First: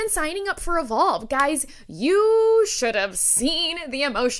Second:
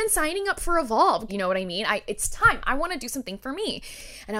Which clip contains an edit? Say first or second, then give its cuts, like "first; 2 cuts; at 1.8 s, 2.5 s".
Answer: second; 1 cut; at 1.3 s